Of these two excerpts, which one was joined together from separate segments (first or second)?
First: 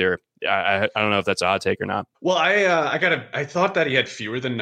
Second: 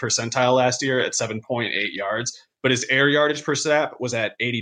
first